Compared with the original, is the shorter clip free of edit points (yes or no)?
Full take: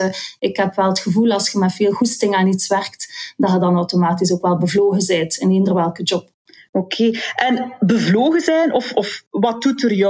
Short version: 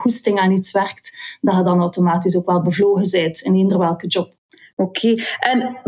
yes